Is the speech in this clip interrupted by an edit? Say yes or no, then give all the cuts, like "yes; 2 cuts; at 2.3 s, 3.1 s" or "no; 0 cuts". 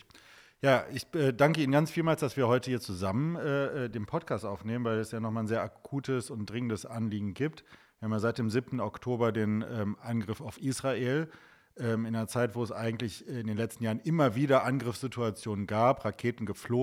no; 0 cuts